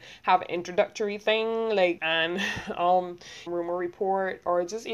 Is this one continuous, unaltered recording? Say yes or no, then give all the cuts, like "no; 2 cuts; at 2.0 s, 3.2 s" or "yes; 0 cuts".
no; 2 cuts; at 2.0 s, 3.5 s